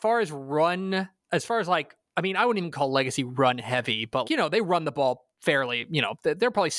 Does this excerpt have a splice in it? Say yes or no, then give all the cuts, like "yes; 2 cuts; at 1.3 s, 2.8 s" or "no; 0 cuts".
yes; 1 cut; at 4.2 s